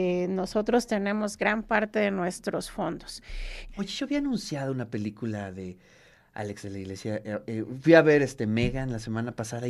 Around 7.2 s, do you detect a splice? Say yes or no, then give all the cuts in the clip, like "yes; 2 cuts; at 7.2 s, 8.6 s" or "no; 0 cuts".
no; 1 cut; at 3.7 s